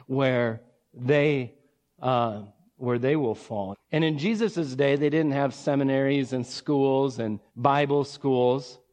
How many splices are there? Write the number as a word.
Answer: two